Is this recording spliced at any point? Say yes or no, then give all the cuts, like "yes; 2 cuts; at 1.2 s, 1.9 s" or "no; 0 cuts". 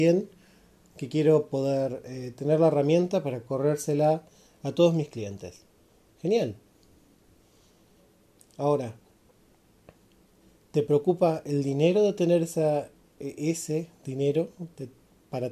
no; 0 cuts